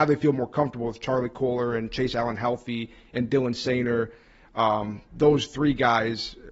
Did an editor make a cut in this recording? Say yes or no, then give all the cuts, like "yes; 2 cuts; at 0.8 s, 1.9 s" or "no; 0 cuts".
no; 0 cuts